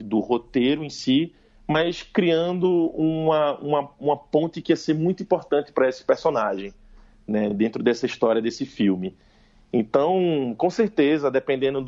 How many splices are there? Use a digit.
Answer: 0